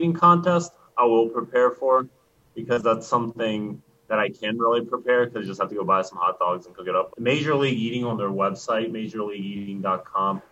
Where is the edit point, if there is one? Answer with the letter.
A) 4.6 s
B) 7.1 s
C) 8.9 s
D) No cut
B